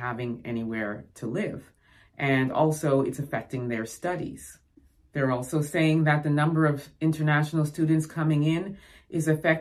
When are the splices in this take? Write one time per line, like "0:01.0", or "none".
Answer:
none